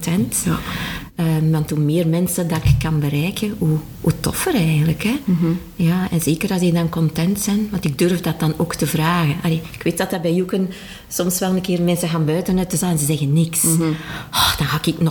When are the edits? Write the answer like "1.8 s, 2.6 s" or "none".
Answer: none